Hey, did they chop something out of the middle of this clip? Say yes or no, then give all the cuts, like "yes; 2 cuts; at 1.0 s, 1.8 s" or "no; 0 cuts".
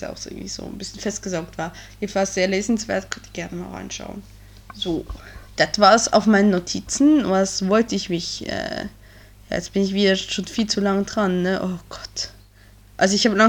no; 0 cuts